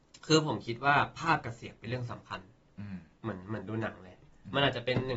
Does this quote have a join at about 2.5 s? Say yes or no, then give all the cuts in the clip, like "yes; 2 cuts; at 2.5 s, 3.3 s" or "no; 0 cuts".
no; 0 cuts